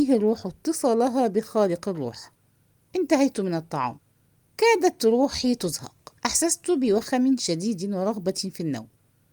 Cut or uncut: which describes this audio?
cut